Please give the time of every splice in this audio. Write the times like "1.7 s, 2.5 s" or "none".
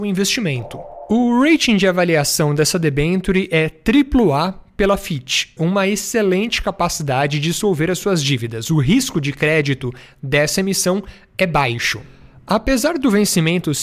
5.6 s